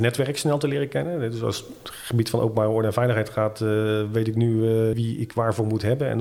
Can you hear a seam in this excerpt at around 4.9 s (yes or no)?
yes